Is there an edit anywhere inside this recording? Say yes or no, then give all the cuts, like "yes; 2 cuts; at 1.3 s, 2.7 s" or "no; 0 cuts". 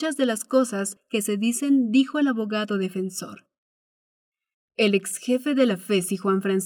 no; 0 cuts